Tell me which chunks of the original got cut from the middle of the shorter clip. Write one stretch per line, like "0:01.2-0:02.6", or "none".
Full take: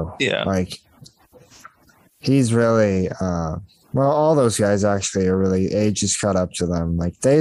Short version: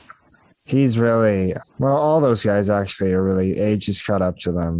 0:03.2-0:03.8